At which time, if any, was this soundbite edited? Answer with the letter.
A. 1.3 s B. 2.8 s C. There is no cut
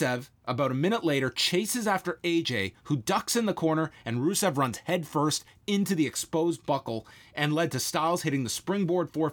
C